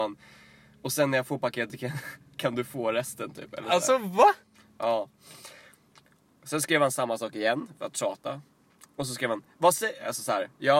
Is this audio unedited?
yes; 0 cuts

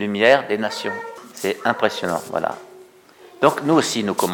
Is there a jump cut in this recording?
no; 0 cuts

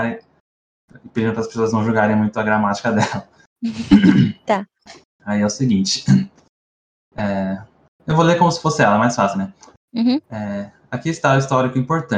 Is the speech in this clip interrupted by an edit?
no; 0 cuts

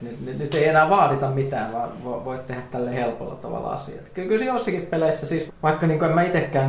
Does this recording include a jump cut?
yes; 1 cut; at 5.5 s

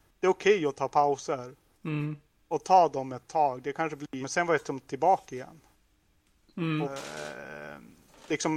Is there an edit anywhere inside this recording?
yes; 2 cuts; at 4.2 s, 6.8 s

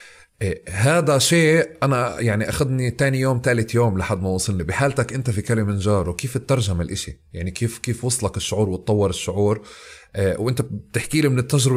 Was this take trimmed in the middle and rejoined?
no; 0 cuts

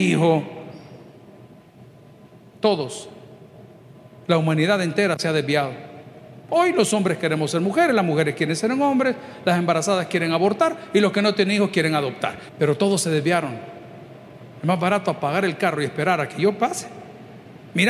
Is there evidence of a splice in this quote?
yes; 1 cut; at 12.5 s

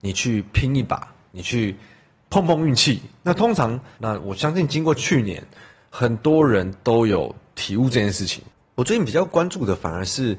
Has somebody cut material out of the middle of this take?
yes; 1 cut; at 4.0 s

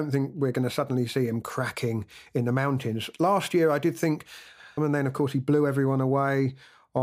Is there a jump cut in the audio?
yes; 1 cut; at 4.8 s

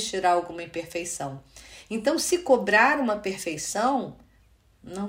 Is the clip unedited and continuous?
yes; 0 cuts

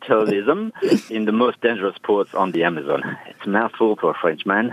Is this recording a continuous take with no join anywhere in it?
no; 1 cut; at 1.1 s

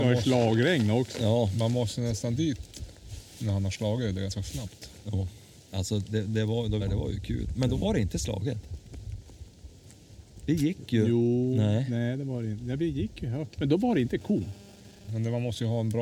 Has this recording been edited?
yes; 3 cuts; at 6.8 s, 13.6 s, 15.1 s

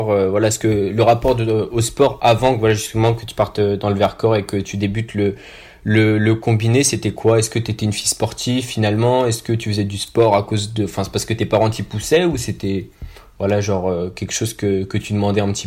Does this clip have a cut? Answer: no; 0 cuts

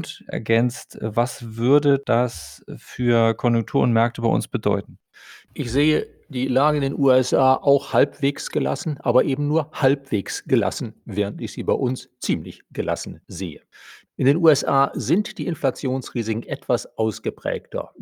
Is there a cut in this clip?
no; 0 cuts

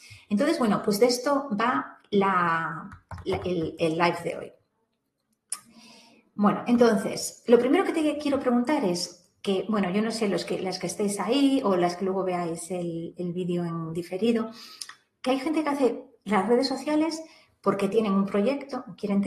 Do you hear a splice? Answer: no; 0 cuts

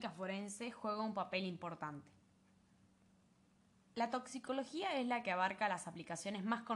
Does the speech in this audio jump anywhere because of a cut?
no; 0 cuts

